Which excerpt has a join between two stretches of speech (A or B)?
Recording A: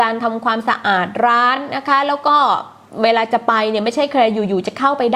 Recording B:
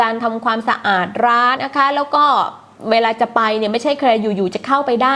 B